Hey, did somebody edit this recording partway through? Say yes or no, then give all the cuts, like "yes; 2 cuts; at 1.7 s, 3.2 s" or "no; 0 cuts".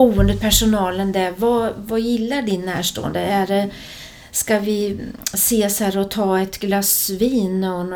no; 0 cuts